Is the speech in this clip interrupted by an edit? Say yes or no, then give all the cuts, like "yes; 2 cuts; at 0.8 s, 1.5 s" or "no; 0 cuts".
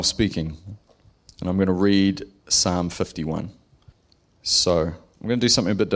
no; 0 cuts